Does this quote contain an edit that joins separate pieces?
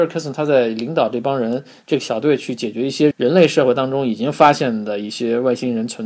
yes; 1 cut; at 3.1 s

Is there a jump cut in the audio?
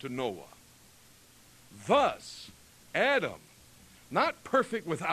no; 0 cuts

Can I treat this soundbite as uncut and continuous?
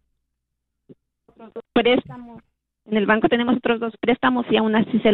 no; 1 cut; at 1.3 s

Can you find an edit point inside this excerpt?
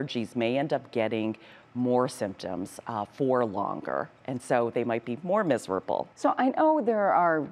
yes; 1 cut; at 6.1 s

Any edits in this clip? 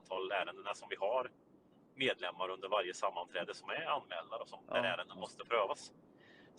no; 0 cuts

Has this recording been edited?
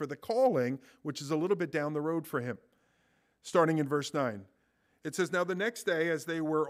no; 0 cuts

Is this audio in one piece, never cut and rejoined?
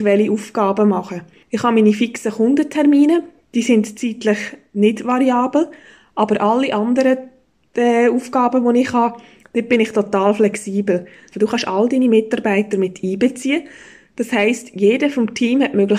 no; 1 cut; at 11.3 s

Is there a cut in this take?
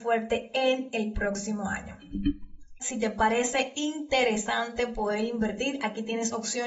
yes; 1 cut; at 2.8 s

